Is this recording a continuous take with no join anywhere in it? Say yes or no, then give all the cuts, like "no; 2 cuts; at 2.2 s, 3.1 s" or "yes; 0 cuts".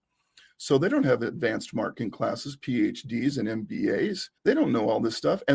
no; 1 cut; at 4.4 s